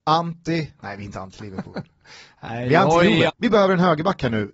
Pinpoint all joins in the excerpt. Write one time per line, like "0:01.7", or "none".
0:03.3